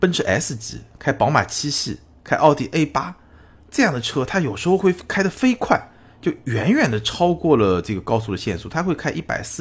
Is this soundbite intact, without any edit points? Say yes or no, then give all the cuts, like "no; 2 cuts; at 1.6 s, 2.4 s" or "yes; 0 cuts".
yes; 0 cuts